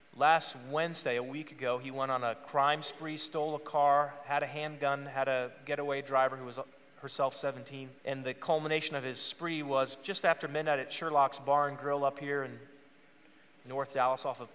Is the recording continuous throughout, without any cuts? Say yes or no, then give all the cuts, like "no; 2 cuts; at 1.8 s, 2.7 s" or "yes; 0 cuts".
no; 1 cut; at 8.0 s